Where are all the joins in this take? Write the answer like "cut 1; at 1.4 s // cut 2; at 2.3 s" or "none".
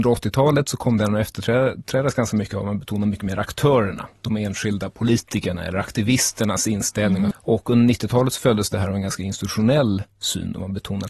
cut 1; at 7.3 s